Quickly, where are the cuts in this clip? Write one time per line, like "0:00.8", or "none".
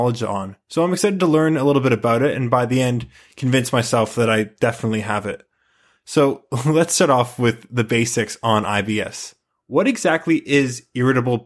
none